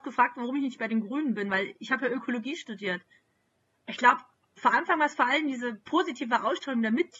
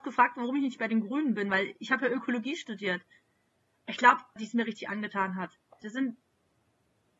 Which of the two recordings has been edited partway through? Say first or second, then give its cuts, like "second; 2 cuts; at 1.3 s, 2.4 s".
second; 2 cuts; at 4.4 s, 5.8 s